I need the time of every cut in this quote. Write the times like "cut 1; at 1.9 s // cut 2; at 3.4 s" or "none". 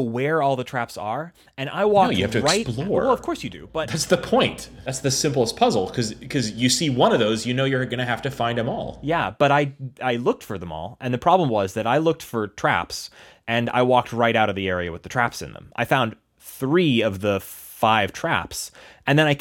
none